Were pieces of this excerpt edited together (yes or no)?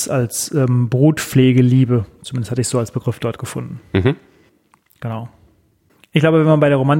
no